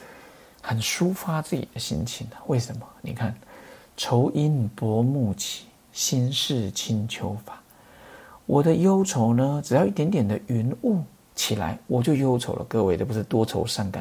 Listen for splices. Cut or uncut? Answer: uncut